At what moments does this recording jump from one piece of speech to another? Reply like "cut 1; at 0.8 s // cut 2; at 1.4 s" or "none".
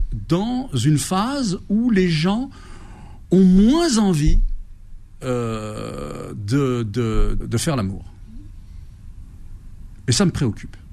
cut 1; at 7.4 s

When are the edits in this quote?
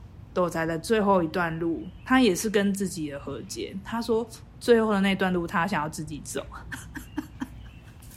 none

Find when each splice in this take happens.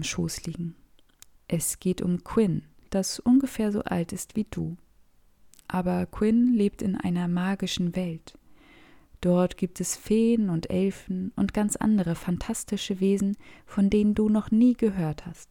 cut 1; at 1.4 s // cut 2; at 2.9 s

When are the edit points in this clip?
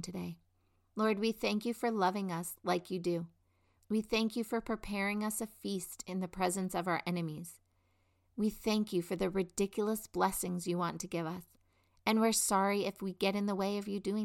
none

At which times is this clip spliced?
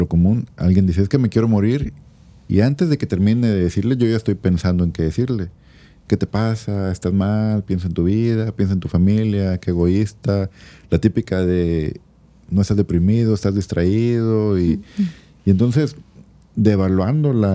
none

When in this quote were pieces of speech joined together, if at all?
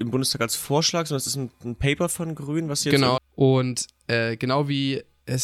cut 1; at 3.2 s

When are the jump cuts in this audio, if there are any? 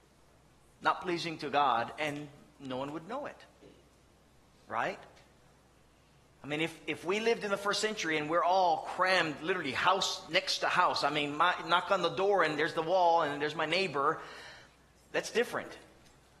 none

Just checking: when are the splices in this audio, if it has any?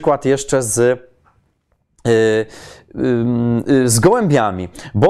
none

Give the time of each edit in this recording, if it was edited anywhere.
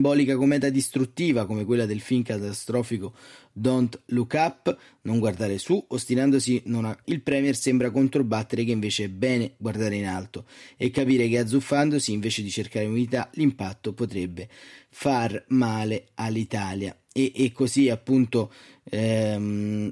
cut 1; at 7.0 s

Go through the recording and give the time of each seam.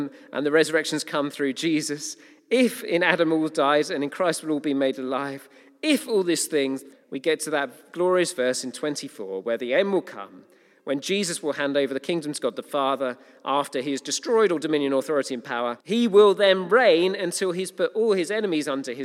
cut 1; at 6.9 s // cut 2; at 15.8 s

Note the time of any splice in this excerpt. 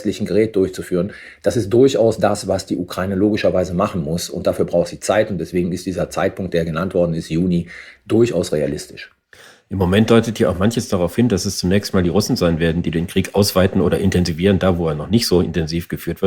none

